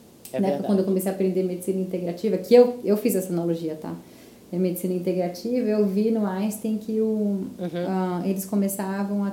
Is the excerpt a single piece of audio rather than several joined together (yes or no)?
yes